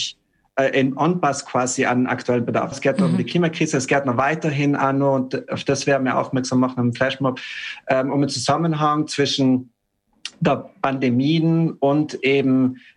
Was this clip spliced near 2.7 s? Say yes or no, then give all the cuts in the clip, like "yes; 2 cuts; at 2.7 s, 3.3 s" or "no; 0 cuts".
yes; 1 cut; at 2.7 s